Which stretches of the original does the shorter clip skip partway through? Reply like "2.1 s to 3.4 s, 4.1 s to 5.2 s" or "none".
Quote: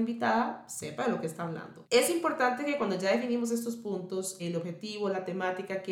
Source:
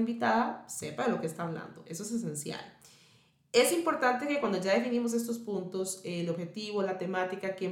1.8 s to 3.5 s, 6.0 s to 6.1 s